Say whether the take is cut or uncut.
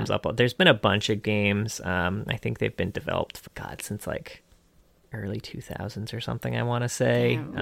cut